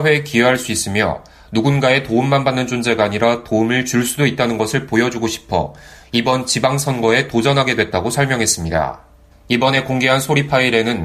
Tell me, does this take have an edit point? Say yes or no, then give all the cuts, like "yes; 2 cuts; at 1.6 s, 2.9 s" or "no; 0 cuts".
yes; 1 cut; at 9.3 s